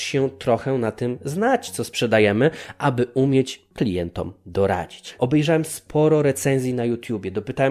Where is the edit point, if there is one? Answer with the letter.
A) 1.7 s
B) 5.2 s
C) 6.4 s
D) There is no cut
B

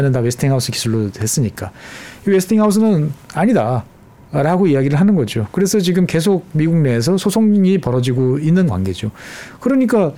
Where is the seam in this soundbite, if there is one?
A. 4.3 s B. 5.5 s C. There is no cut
C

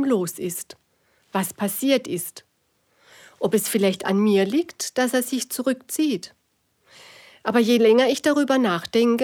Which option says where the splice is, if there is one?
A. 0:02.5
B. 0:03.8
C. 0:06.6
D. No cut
D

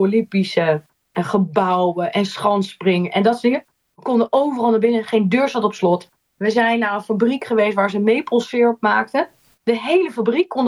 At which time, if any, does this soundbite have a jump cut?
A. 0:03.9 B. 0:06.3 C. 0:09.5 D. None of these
A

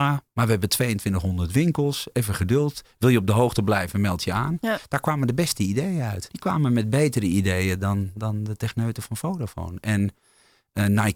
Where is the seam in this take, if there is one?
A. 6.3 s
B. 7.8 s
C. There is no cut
A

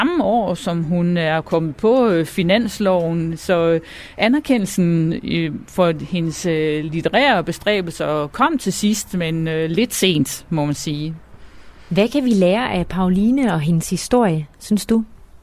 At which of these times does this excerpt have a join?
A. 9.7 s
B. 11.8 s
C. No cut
C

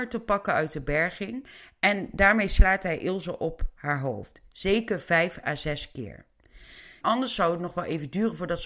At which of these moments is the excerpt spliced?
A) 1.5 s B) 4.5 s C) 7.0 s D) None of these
C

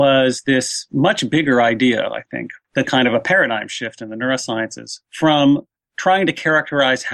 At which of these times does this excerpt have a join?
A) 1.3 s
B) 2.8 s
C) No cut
B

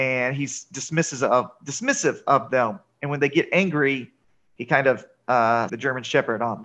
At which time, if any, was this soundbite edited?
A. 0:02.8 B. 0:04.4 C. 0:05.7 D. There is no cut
C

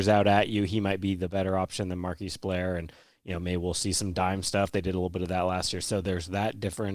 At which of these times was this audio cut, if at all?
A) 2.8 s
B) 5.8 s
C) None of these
B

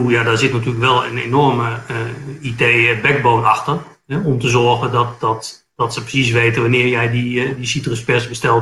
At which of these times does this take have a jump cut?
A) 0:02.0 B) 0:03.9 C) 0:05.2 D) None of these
D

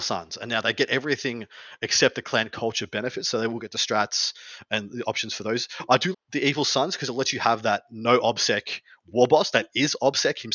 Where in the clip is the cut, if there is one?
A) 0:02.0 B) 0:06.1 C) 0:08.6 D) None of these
B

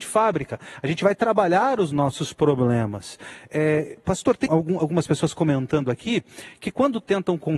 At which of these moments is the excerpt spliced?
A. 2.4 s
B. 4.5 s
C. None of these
B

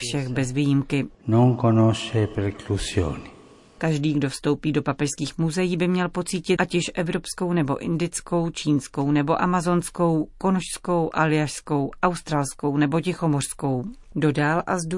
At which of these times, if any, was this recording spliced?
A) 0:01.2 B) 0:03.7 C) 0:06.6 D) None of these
C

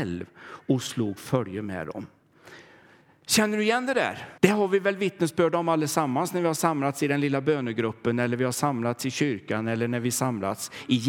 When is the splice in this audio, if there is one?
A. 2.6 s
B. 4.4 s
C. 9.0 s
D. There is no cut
B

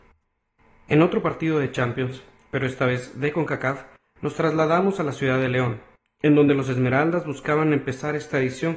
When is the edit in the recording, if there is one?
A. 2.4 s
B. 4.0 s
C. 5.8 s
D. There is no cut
D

